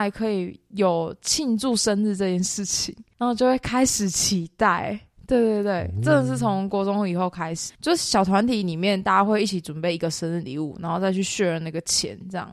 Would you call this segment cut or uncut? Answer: cut